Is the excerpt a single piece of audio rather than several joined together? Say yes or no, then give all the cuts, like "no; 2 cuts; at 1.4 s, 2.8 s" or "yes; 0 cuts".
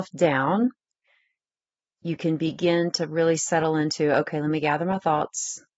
yes; 0 cuts